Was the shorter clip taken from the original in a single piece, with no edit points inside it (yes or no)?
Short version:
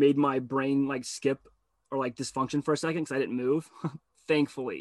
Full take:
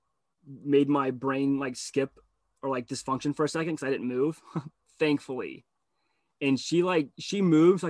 yes